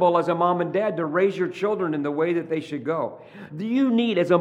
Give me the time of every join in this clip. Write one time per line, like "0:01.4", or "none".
0:03.5